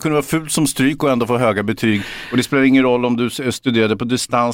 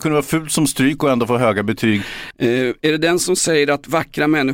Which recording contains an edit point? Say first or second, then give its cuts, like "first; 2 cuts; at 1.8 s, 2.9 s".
second; 1 cut; at 2.3 s